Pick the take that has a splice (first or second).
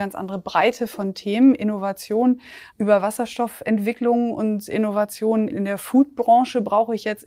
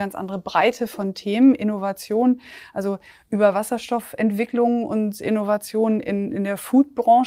first